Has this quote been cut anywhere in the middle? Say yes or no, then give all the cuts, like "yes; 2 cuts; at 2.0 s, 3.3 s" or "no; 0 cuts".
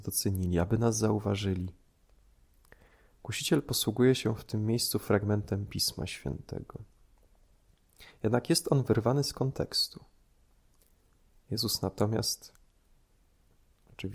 no; 0 cuts